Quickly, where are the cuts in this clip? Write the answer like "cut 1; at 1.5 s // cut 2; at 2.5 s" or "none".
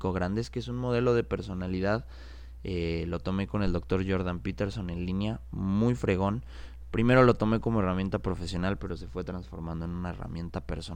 none

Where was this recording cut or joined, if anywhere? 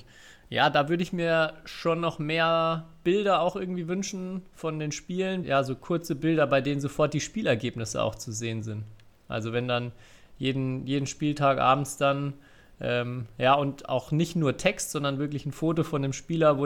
cut 1; at 5.4 s

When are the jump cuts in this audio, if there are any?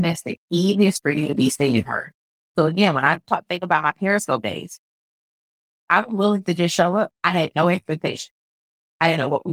cut 1; at 5.9 s // cut 2; at 7.1 s

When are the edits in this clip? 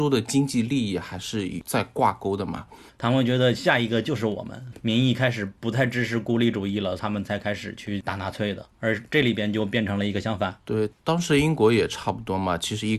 cut 1; at 2.9 s

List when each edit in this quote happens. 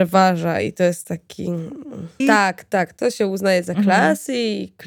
cut 1; at 2.2 s

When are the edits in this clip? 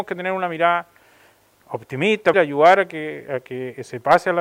cut 1; at 2.3 s

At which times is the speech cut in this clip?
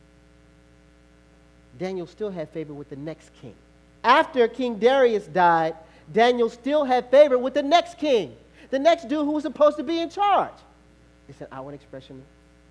cut 1; at 4.0 s // cut 2; at 11.1 s

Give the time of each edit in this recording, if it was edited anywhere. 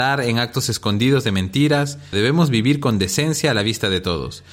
cut 1; at 2.1 s

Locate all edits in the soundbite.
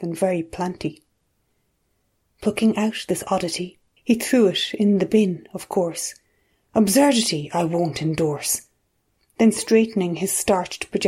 cut 1; at 4.0 s

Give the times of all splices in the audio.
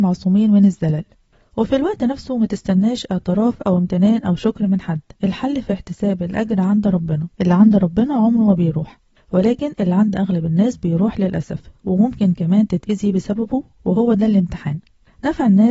cut 1; at 5.2 s // cut 2; at 7.3 s

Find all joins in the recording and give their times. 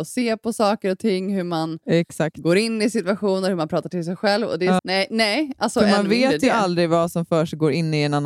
cut 1; at 4.8 s

